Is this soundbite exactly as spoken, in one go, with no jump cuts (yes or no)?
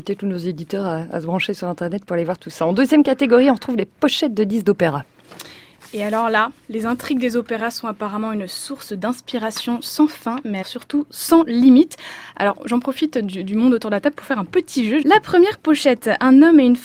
no